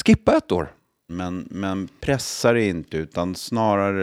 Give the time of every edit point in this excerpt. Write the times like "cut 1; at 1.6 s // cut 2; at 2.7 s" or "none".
cut 1; at 1.1 s